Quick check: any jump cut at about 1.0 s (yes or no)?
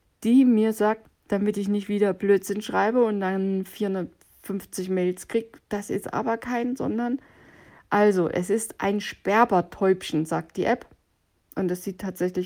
yes